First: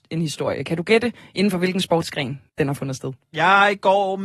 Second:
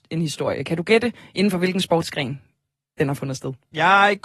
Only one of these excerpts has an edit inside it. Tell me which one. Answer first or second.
first